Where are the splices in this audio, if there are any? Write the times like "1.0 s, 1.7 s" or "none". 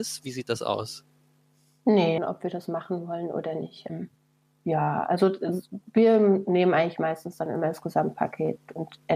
2.2 s, 3.9 s